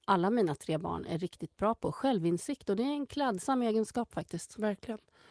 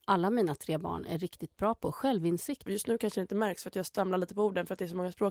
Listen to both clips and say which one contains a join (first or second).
second